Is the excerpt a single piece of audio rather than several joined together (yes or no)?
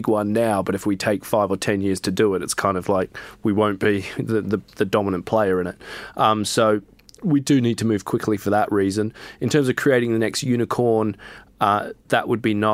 yes